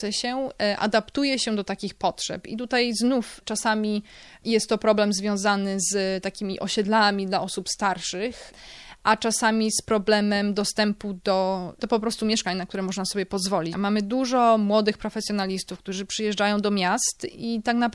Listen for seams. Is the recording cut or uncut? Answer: cut